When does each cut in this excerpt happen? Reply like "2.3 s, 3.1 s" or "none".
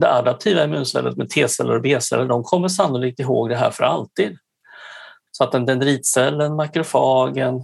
5.3 s